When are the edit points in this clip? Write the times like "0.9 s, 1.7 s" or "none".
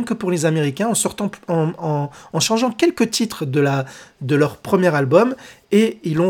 none